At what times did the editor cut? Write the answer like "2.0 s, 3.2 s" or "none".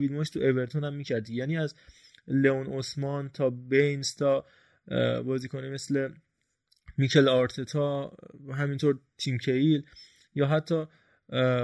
none